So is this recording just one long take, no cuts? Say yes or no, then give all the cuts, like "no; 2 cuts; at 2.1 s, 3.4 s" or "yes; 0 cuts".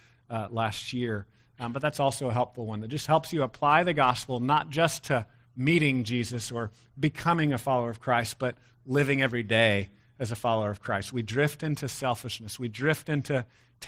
yes; 0 cuts